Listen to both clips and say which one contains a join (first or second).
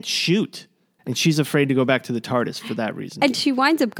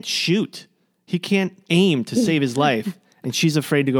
first